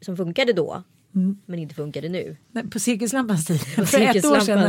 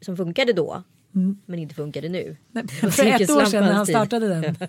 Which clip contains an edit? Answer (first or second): second